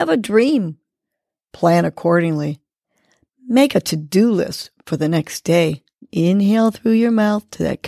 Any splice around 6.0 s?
yes; 1 cut; at 6.0 s

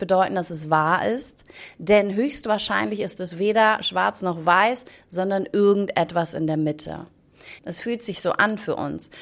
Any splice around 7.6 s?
yes; 1 cut; at 7.6 s

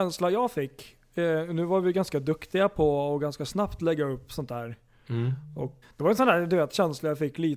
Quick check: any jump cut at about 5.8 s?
yes; 1 cut; at 5.8 s

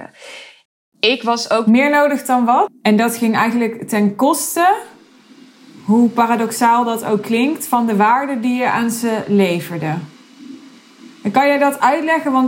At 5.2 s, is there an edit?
no; 1 cut; at 2.7 s

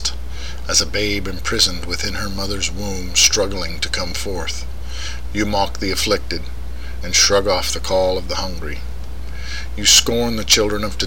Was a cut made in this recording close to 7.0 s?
yes; 2 cuts; at 5.2 s, 7.0 s

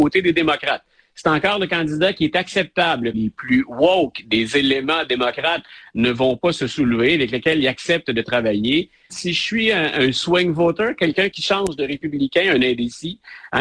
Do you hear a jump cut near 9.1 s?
yes; 2 cuts; at 3.1 s, 9.1 s

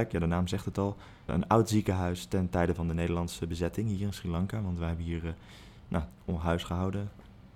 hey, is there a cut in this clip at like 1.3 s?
yes; 2 cuts; at 1.3 s, 6.1 s

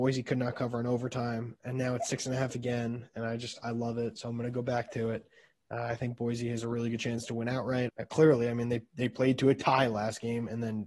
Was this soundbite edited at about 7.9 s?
yes; 1 cut; at 7.9 s

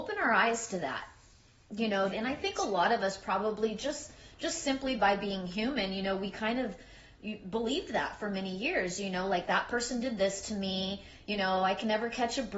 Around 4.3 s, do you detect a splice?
no; 1 cut; at 2.1 s

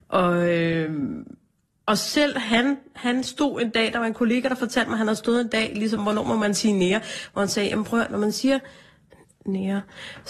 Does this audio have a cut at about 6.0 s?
yes; 1 cut; at 6.0 s

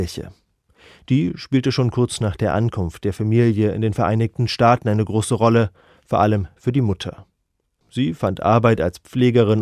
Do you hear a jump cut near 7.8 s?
no; 0 cuts

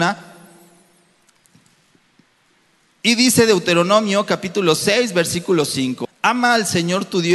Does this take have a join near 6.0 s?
yes; 1 cut; at 6.0 s

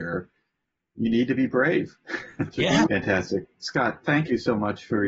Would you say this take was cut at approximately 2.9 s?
yes; 1 cut; at 2.9 s

